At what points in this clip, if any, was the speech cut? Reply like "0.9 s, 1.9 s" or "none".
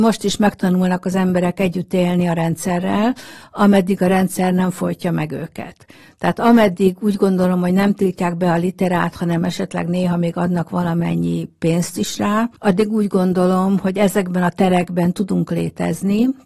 12.6 s